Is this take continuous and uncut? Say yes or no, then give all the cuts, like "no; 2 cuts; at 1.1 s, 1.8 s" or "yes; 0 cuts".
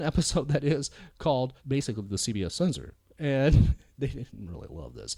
no; 1 cut; at 1.6 s